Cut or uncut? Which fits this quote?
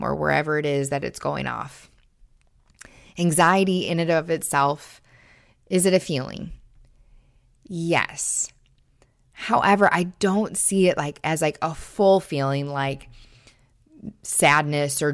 uncut